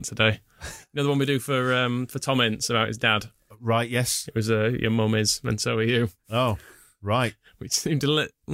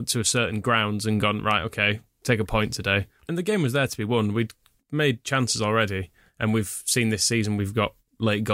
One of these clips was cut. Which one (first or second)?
second